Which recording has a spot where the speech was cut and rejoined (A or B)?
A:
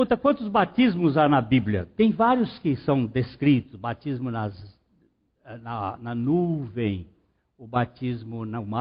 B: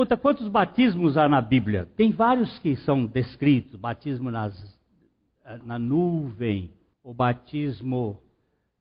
B